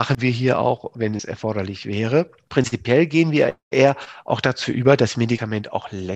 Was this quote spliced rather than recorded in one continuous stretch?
no; 0 cuts

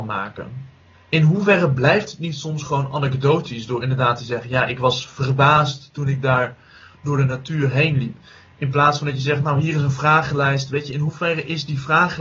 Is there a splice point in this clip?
yes; 1 cut; at 0.9 s

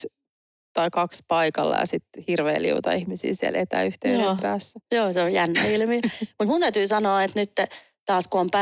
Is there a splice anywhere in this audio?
no; 0 cuts

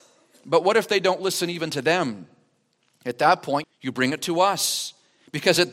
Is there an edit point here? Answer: yes; 1 cut; at 3.6 s

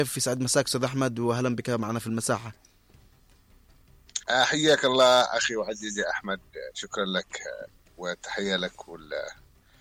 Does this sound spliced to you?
yes; 1 cut; at 4.2 s

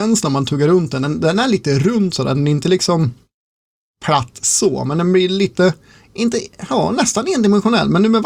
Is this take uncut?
yes; 0 cuts

